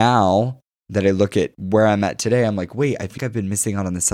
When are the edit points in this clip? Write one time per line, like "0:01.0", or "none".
0:03.2